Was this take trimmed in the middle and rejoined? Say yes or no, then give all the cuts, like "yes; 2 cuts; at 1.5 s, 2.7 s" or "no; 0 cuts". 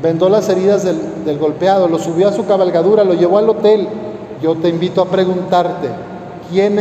yes; 1 cut; at 4.4 s